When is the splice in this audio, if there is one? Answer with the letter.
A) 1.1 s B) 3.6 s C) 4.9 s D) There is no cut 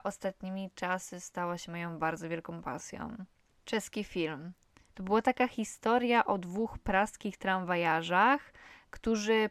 C